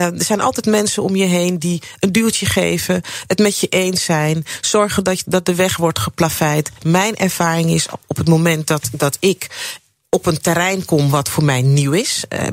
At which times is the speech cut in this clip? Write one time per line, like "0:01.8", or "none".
none